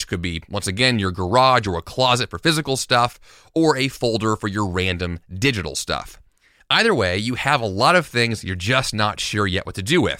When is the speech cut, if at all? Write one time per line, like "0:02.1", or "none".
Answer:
none